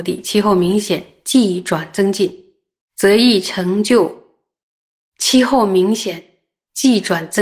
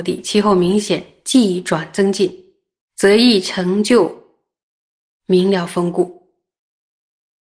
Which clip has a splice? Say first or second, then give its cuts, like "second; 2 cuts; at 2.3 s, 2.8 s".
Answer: first; 1 cut; at 5.0 s